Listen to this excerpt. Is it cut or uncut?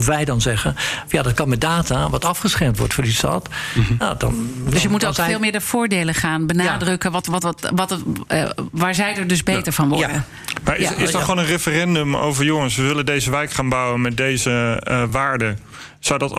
uncut